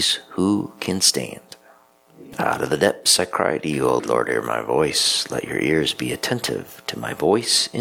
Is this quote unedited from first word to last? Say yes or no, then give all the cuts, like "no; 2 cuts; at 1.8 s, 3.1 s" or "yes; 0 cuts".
no; 1 cut; at 4.0 s